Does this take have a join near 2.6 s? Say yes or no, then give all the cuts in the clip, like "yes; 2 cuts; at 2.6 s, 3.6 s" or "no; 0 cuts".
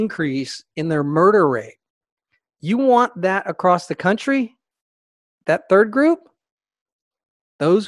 no; 1 cut; at 5.3 s